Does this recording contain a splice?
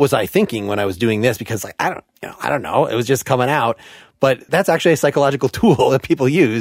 no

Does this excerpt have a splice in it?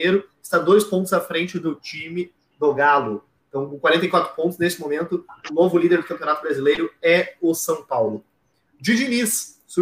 no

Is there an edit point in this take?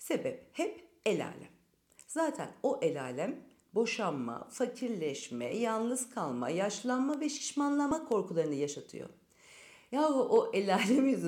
no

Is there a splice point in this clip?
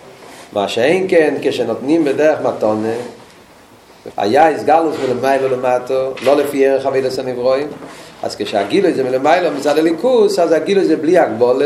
yes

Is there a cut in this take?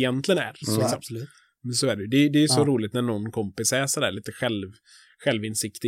yes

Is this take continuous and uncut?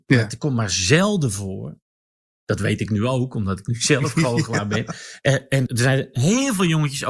no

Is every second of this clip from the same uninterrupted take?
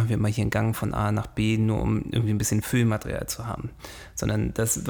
yes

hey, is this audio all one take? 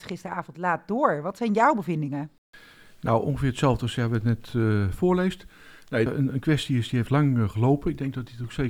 no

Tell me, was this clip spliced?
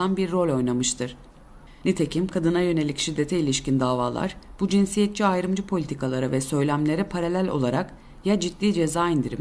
yes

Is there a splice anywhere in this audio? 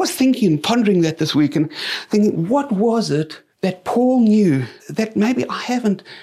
yes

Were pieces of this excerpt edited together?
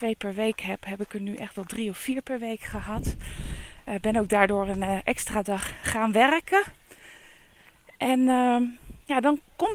no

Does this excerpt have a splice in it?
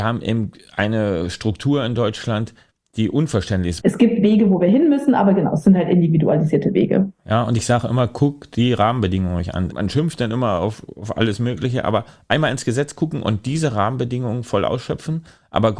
yes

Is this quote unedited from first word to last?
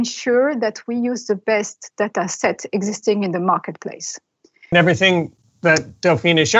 no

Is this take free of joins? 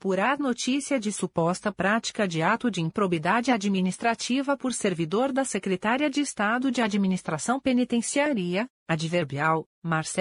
yes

